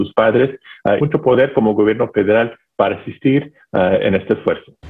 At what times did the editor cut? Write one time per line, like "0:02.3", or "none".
0:01.0

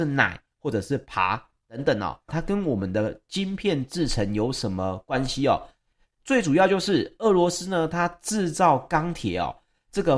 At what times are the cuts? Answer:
0:02.3

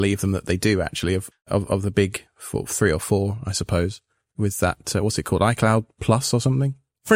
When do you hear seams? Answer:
0:01.3

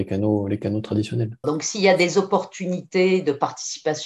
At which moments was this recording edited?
0:01.4

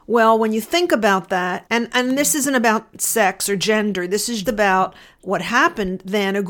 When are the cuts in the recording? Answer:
0:01.7
0:04.4

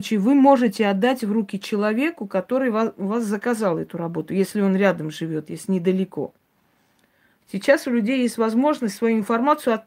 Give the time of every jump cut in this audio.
0:07.4

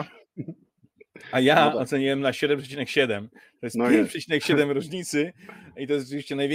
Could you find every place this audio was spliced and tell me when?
none

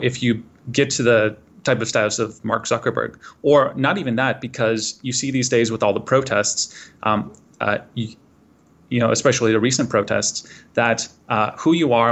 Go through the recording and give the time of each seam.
none

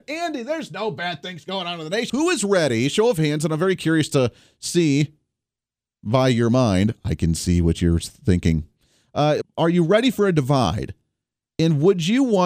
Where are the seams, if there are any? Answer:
0:02.1
0:09.4

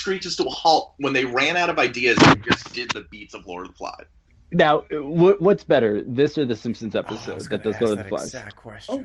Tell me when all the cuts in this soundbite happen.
none

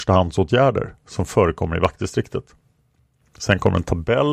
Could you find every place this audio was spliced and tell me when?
0:03.2

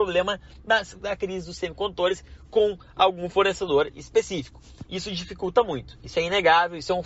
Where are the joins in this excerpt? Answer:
0:04.8

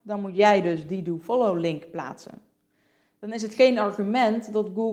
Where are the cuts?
none

